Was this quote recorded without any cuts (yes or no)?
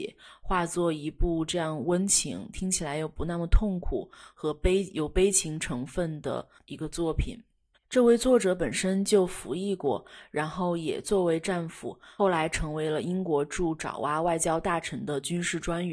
no